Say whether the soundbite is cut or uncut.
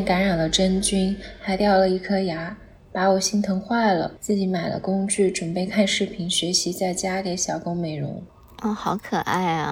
uncut